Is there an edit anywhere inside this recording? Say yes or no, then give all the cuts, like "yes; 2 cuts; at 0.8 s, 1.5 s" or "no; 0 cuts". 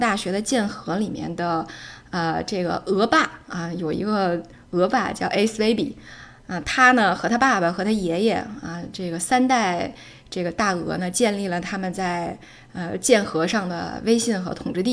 no; 0 cuts